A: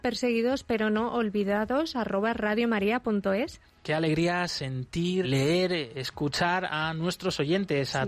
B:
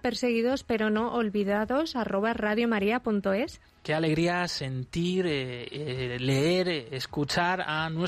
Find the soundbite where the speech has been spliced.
A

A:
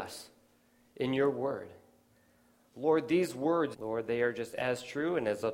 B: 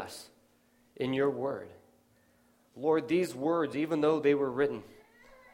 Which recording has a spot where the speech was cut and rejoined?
A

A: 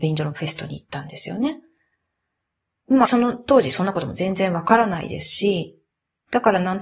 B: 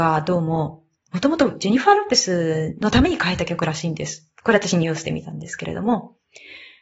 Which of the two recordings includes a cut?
A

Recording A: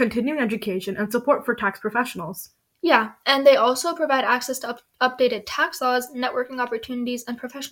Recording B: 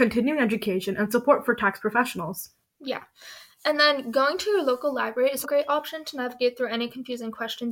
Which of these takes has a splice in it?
B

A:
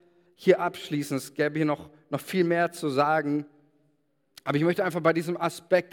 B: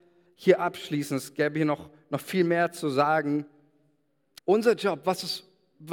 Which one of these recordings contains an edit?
B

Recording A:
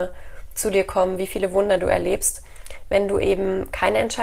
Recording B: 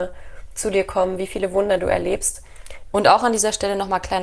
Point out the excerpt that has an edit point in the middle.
B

